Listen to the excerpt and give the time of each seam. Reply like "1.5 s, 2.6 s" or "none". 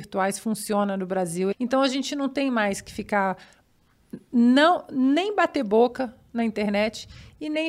1.5 s